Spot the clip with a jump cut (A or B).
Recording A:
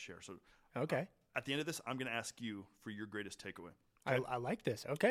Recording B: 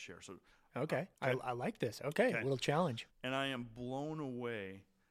B